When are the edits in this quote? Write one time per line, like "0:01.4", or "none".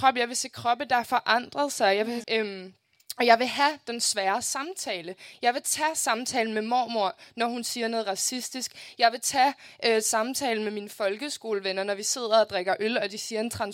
0:02.2